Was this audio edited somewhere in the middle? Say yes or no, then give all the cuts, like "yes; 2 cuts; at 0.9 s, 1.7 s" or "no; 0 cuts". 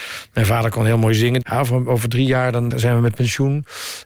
yes; 2 cuts; at 1.4 s, 2.7 s